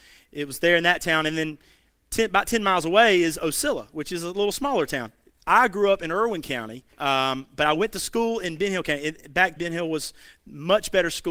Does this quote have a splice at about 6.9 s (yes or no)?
yes